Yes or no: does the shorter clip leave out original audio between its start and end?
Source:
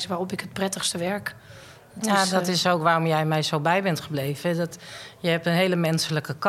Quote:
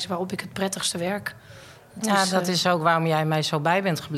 no